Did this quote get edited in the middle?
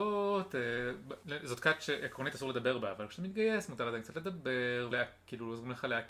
yes; 1 cut; at 4.9 s

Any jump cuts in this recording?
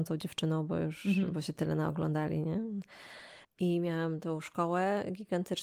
yes; 1 cut; at 3.4 s

